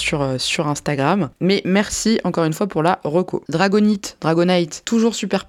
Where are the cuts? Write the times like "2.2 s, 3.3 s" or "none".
1.3 s